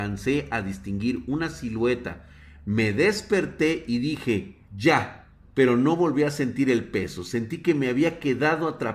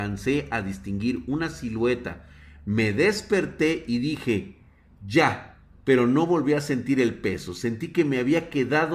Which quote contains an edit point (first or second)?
first